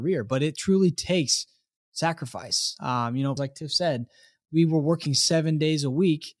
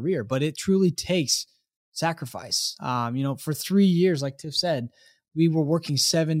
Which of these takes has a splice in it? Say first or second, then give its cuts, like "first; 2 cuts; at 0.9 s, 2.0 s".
first; 1 cut; at 3.4 s